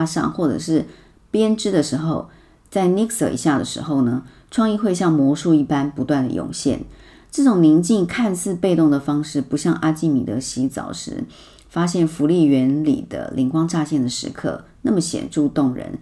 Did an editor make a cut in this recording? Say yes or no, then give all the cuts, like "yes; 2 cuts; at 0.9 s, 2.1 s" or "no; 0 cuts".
no; 0 cuts